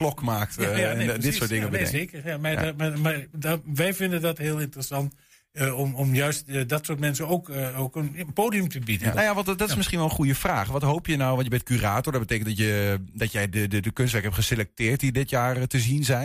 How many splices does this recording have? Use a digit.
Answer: 1